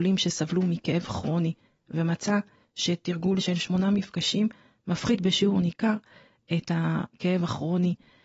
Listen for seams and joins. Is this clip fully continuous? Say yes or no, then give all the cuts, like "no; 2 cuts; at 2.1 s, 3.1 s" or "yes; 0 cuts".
yes; 0 cuts